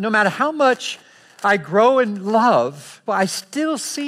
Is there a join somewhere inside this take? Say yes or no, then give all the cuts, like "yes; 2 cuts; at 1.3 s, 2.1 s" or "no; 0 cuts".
yes; 1 cut; at 3.1 s